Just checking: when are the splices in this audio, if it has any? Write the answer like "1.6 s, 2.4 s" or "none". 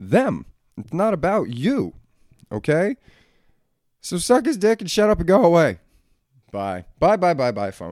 6.4 s